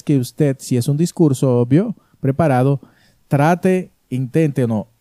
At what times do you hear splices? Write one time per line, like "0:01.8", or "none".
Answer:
none